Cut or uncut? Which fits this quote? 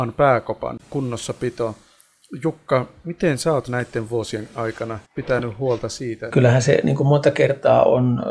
cut